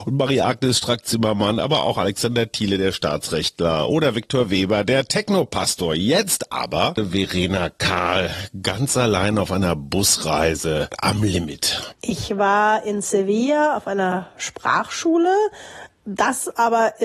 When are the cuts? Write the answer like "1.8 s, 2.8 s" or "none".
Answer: 12.0 s